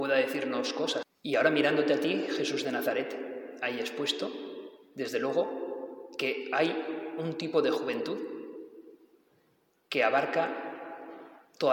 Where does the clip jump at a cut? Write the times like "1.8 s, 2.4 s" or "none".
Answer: 1.0 s